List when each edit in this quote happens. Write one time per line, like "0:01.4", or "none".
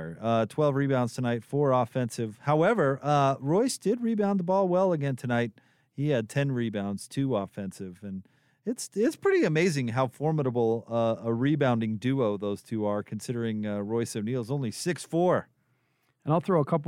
none

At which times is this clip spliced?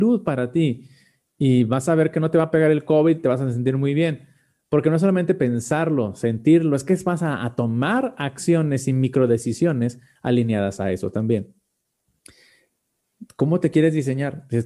none

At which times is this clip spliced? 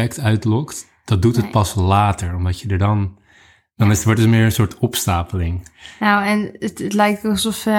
none

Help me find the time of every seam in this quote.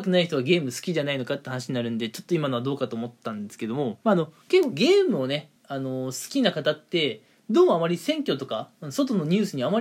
0:04.0
0:05.6

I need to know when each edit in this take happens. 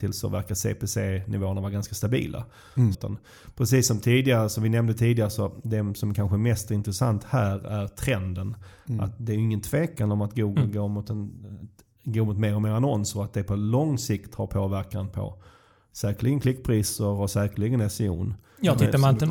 0:02.9

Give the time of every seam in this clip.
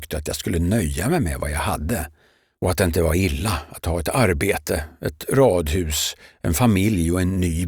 none

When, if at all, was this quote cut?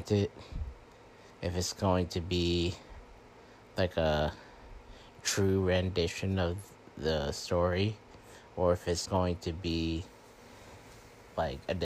0:09.0

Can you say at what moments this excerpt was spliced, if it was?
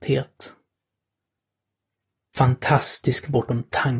none

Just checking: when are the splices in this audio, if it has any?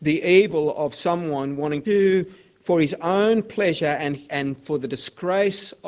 0:01.8
0:04.3

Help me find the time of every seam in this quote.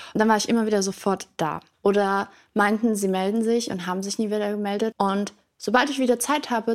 0:01.7
0:04.9

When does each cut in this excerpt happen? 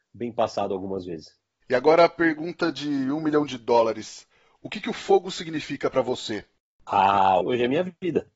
0:07.4

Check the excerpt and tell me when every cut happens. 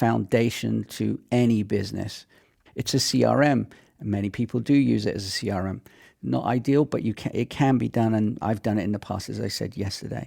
0:02.7

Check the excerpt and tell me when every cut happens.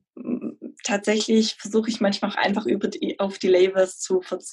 none

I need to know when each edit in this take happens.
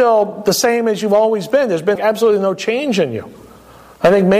0:02.0

